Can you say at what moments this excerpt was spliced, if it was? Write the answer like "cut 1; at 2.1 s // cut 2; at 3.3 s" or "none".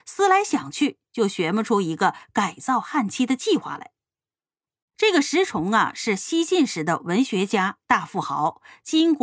cut 1; at 4.8 s